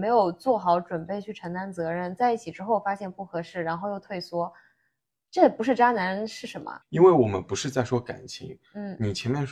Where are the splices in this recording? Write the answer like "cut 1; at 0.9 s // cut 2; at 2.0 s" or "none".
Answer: cut 1; at 6.8 s